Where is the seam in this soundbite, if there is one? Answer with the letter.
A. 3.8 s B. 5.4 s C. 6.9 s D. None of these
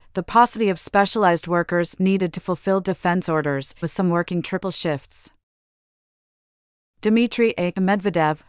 A